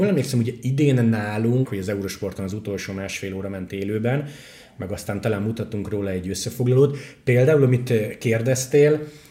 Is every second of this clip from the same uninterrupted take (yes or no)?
no